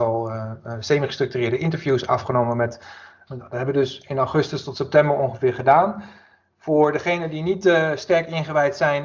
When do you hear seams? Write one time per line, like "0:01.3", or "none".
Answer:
0:03.3